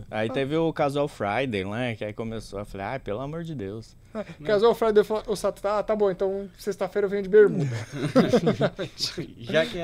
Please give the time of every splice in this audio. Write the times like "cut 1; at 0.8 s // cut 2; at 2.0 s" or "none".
none